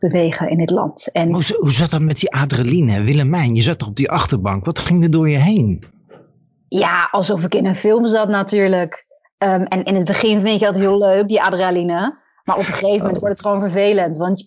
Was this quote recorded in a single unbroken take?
yes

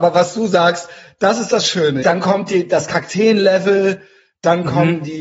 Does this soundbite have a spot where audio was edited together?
yes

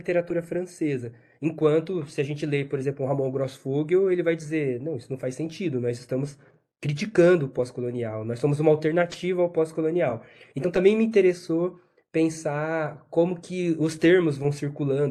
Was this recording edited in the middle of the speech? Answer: no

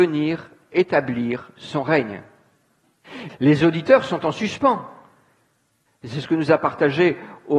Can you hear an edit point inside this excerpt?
yes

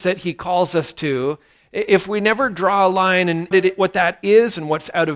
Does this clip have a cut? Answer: yes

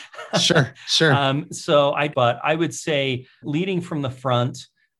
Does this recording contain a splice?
yes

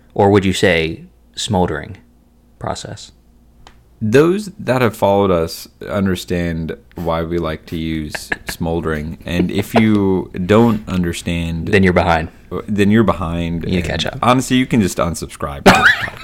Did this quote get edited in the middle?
no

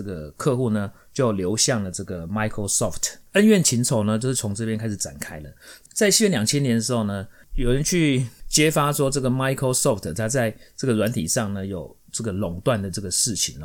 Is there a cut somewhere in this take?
no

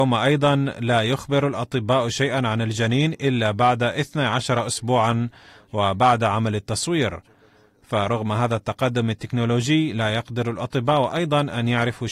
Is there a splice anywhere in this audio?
no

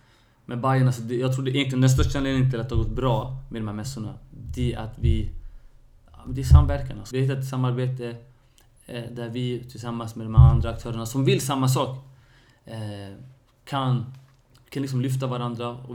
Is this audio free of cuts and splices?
no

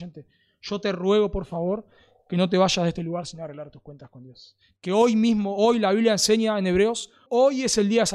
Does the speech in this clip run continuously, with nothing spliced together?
no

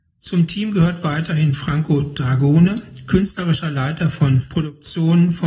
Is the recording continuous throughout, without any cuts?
yes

